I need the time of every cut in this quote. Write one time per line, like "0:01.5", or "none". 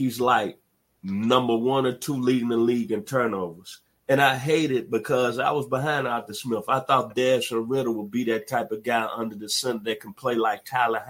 none